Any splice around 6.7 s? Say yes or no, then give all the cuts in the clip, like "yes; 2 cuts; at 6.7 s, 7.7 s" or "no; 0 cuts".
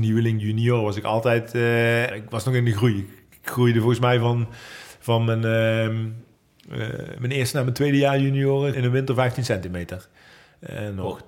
no; 2 cuts; at 2.1 s, 8.7 s